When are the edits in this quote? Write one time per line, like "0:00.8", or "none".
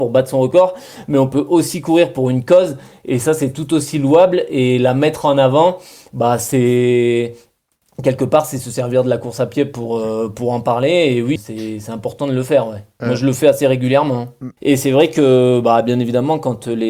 0:11.4
0:14.6